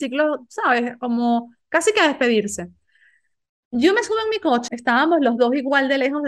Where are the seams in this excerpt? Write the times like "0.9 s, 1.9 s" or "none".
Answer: 4.7 s